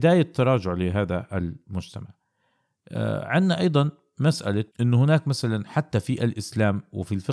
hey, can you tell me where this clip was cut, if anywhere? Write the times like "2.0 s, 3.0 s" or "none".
4.7 s